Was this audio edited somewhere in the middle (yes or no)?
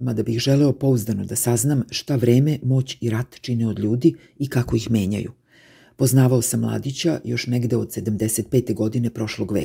no